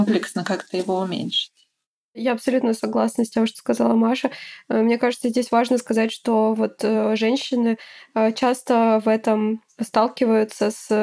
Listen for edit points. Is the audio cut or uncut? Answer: uncut